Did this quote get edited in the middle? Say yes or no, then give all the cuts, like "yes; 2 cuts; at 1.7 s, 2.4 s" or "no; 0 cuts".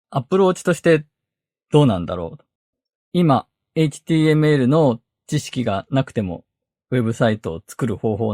yes; 1 cut; at 3.0 s